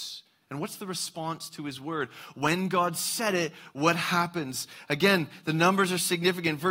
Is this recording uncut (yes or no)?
yes